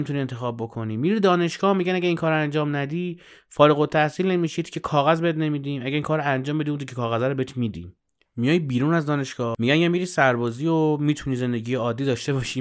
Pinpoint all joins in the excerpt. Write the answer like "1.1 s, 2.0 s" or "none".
none